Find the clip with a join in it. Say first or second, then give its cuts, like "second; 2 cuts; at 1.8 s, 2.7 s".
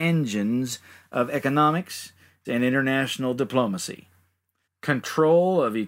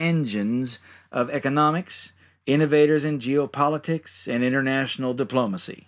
first; 2 cuts; at 2.4 s, 4.6 s